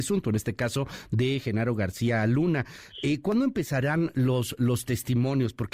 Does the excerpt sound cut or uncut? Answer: uncut